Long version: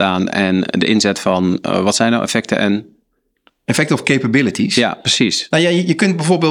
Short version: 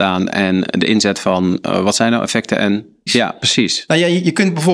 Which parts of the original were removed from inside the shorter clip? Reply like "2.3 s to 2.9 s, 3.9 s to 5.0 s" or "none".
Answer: 3.1 s to 4.7 s

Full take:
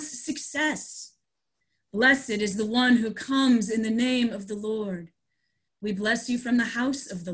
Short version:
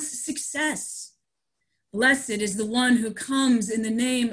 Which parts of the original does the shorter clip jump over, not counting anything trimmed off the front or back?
none

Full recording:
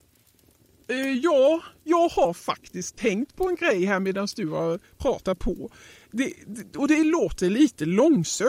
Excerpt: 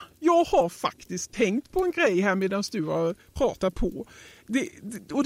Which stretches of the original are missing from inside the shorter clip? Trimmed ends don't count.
none

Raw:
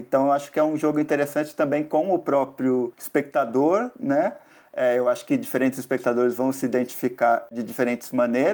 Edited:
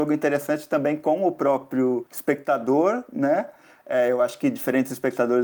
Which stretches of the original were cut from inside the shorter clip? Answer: none

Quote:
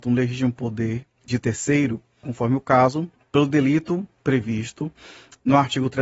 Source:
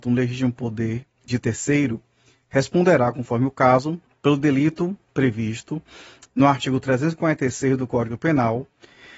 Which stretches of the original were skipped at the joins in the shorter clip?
2.2 s to 3.1 s

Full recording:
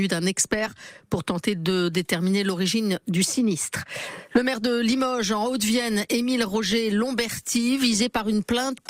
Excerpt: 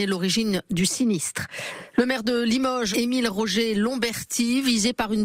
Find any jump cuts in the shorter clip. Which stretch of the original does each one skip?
5.3 s to 6.1 s

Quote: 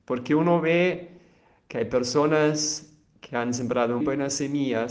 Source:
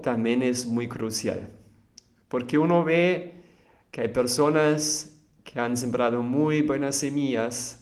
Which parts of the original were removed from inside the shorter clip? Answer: 6.2 s to 6.6 s

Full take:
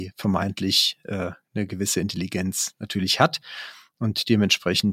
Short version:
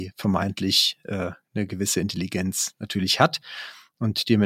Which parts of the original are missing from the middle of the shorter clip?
none

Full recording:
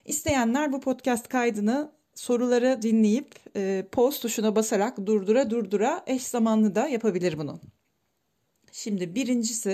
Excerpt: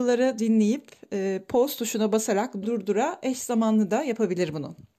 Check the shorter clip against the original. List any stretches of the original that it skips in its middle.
5.1 s to 5.5 s

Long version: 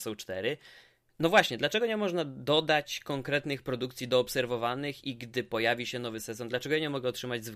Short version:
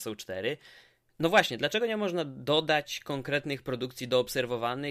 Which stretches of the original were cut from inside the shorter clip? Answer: none

